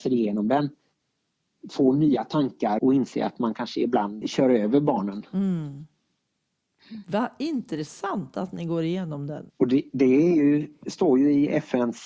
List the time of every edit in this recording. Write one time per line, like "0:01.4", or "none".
0:02.8
0:04.2
0:09.5